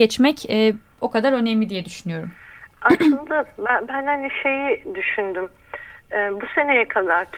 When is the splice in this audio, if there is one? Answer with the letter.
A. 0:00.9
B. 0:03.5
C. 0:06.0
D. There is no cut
D